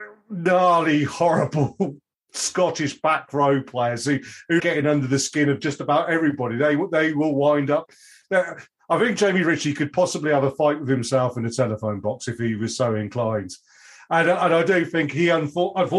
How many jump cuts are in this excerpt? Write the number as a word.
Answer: one